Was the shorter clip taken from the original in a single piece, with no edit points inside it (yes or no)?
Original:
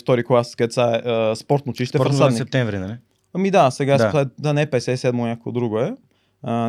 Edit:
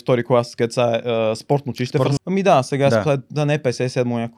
no